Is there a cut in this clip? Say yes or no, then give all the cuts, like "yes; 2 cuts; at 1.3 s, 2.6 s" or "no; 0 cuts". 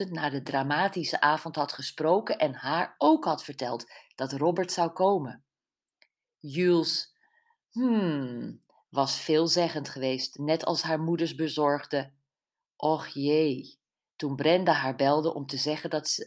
no; 0 cuts